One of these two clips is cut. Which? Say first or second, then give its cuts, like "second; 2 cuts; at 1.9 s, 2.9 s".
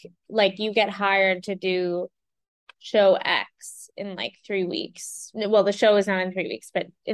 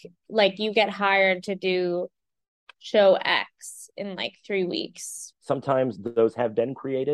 second; 1 cut; at 5.3 s